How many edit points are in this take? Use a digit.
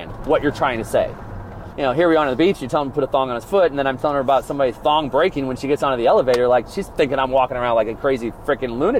1